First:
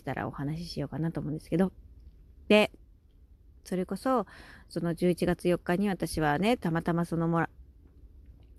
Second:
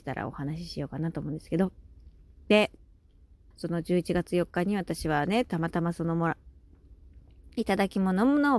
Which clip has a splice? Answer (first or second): second